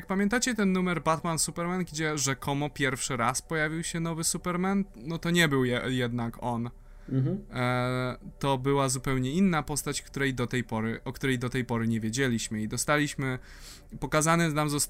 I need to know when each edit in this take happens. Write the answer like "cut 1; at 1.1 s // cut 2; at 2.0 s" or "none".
none